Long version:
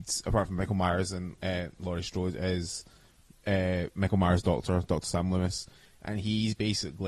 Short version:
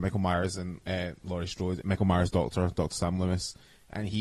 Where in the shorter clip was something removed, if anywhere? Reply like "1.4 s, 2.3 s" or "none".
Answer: 1.8 s